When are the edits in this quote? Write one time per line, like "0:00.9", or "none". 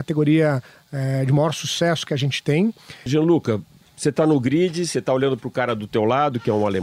0:03.1